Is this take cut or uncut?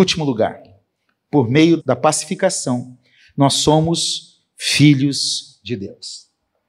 cut